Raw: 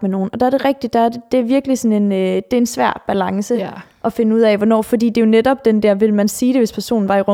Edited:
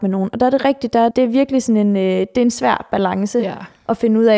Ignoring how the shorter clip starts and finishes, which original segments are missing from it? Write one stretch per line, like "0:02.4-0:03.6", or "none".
0:01.1-0:01.3